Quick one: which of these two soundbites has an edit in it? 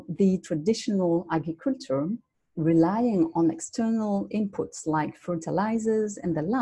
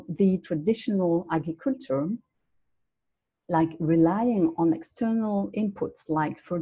first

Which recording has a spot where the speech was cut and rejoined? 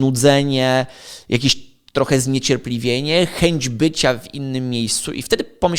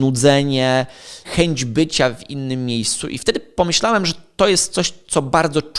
second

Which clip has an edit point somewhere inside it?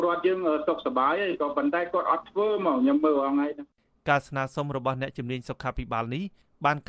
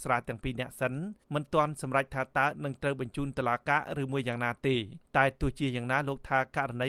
second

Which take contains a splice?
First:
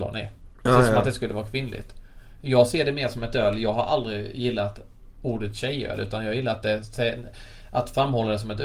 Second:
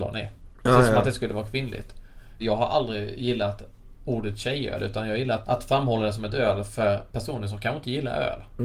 second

